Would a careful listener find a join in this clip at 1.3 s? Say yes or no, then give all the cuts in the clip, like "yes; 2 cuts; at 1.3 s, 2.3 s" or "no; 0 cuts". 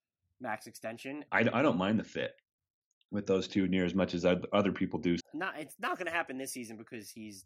yes; 2 cuts; at 1.3 s, 5.2 s